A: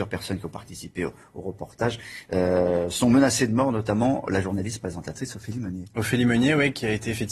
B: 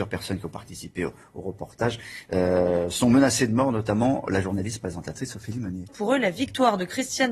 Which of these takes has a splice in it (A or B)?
B